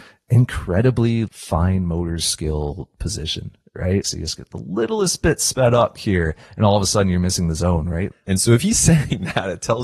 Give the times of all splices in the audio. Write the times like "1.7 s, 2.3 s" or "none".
1.3 s, 4.0 s, 8.1 s